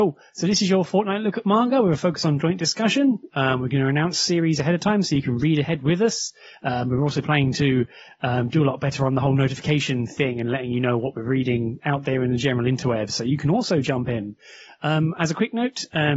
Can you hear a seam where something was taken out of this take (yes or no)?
no